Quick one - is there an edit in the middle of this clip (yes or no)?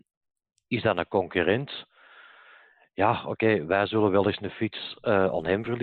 no